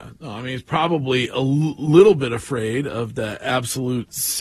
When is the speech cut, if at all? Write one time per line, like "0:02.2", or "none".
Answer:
none

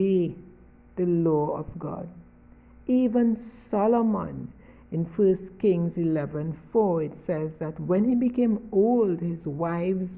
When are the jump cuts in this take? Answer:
none

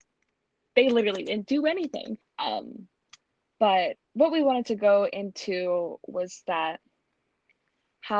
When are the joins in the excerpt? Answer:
0:02.2
0:04.0

